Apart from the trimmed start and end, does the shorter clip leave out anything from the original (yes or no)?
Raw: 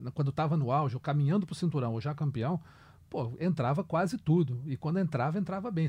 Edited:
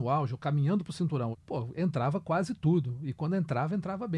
yes